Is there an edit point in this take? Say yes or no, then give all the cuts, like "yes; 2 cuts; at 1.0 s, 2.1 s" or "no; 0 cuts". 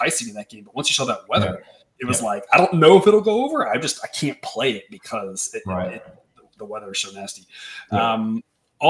no; 0 cuts